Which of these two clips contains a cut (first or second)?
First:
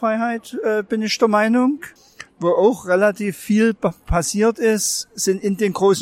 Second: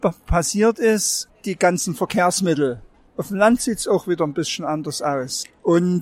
second